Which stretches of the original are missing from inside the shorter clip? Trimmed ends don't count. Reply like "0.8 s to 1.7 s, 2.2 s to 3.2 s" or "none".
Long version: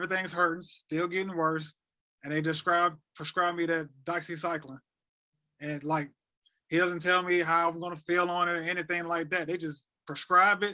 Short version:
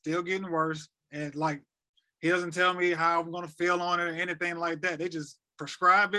1.9 s to 5.5 s

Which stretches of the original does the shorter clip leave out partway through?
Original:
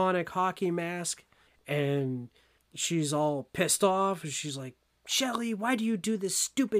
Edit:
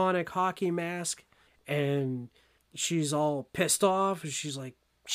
none

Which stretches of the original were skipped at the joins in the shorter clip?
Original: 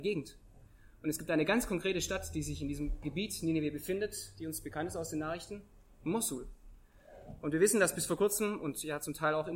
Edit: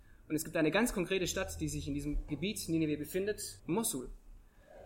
4.3 s to 6.0 s

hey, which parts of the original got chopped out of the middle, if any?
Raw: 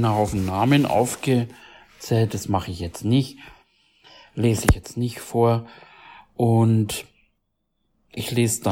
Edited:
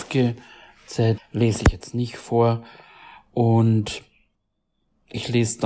2.3 s to 4.2 s

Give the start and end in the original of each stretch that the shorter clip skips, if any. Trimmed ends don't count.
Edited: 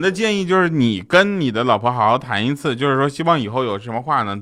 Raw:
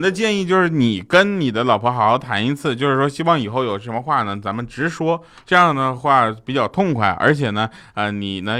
none

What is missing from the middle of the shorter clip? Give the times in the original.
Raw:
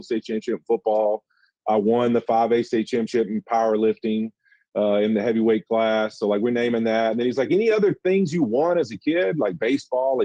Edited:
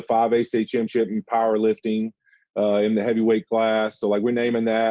none

